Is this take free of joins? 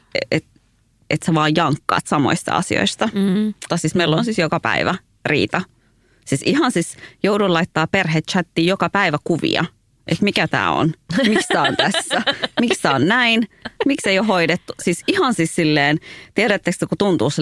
no; 1 cut; at 3.7 s

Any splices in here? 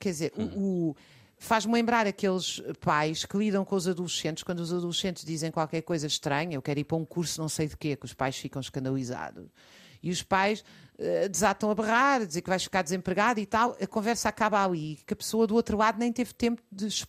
no; 0 cuts

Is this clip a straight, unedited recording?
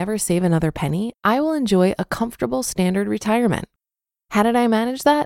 yes; 0 cuts

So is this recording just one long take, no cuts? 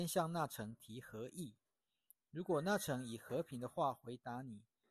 yes; 0 cuts

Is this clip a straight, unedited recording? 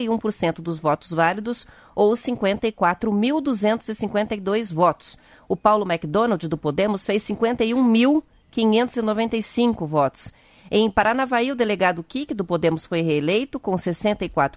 yes; 0 cuts

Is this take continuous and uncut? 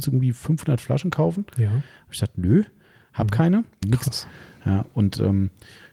no; 1 cut; at 3.8 s

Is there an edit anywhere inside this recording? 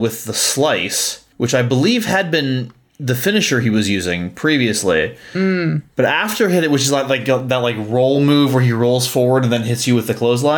no; 0 cuts

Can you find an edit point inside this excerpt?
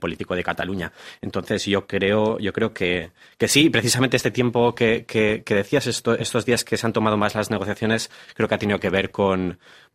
no; 0 cuts

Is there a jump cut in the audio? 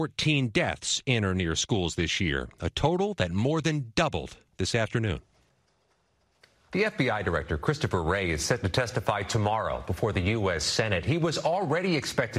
no; 0 cuts

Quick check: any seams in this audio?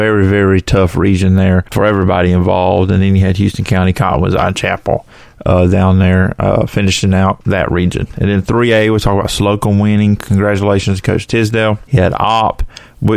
no; 0 cuts

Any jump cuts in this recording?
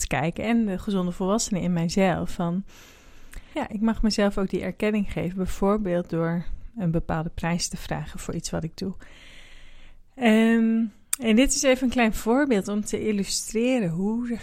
yes; 1 cut; at 3.5 s

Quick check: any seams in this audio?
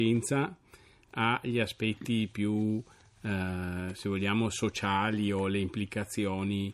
no; 0 cuts

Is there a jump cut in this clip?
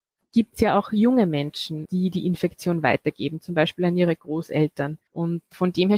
yes; 1 cut; at 5.1 s

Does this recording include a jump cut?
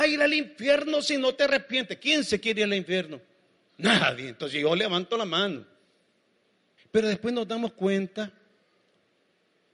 yes; 1 cut; at 6.8 s

